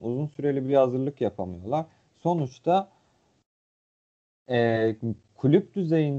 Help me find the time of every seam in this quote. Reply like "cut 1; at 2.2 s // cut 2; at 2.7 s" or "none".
none